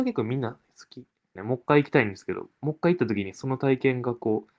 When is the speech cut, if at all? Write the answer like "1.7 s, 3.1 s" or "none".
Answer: 1.4 s